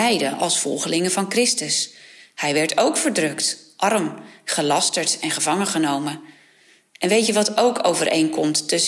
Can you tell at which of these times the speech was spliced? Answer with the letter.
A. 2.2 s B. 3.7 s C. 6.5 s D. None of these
D